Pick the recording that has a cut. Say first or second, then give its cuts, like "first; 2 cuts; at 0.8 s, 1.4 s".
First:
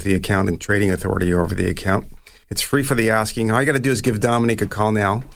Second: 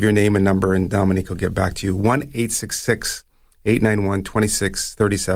first; 1 cut; at 2.4 s